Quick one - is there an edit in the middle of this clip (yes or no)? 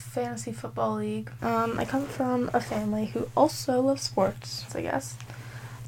yes